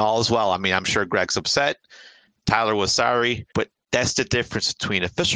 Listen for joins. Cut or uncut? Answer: cut